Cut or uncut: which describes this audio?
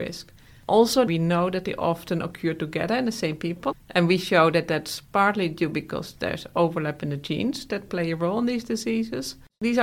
cut